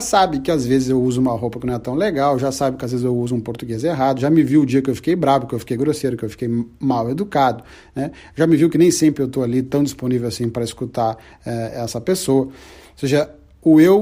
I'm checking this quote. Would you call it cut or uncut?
uncut